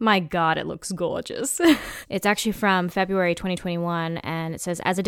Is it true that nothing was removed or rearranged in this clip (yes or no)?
no